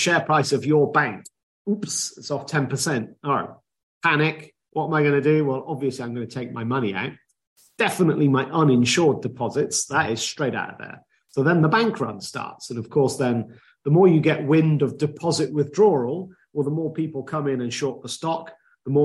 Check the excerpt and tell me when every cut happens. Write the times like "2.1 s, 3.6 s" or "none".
none

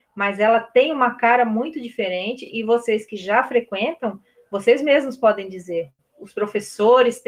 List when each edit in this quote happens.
none

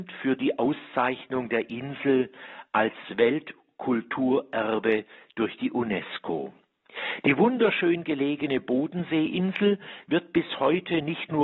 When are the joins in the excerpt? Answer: none

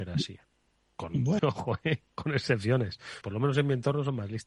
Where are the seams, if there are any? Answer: 1.4 s, 3.2 s

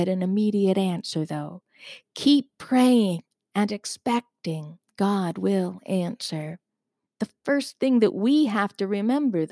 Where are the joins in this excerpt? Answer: 4.8 s, 7.0 s

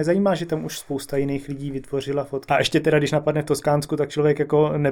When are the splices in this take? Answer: 2.5 s

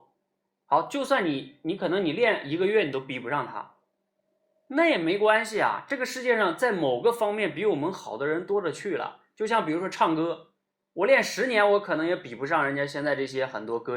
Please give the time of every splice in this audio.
none

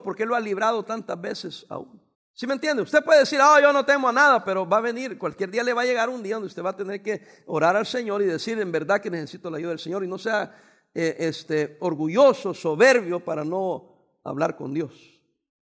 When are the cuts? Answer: 2.1 s

